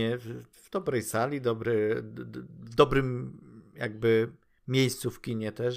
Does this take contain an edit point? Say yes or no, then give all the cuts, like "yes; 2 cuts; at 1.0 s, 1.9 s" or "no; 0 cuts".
no; 0 cuts